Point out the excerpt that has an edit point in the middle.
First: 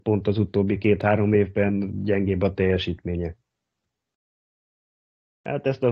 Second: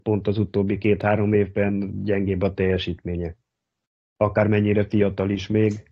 first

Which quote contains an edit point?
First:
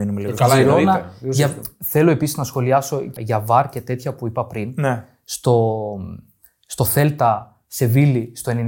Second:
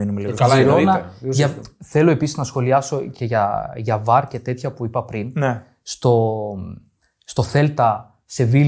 first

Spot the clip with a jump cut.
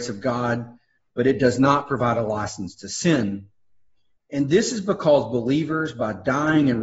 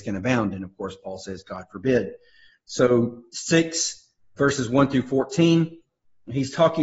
second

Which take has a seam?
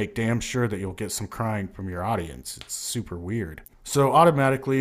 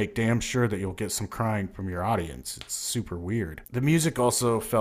first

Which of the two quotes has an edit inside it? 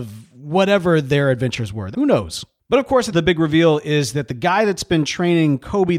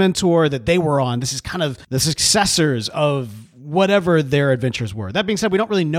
first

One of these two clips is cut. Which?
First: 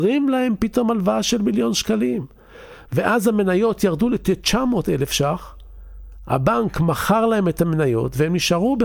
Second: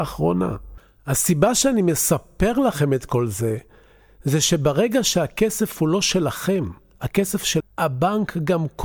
second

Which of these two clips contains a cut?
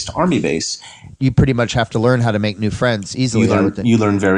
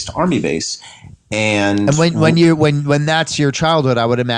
first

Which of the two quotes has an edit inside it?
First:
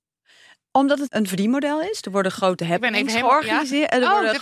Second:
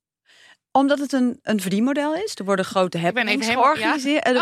first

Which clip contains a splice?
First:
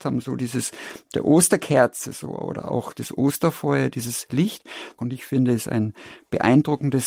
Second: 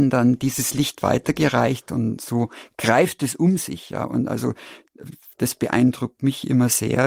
first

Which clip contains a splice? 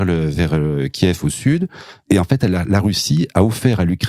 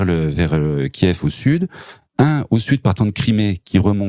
first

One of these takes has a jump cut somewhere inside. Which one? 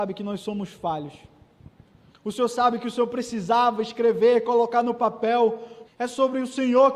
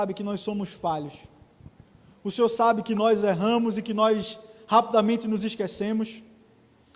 first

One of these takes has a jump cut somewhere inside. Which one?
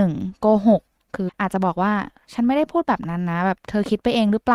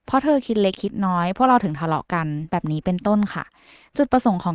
first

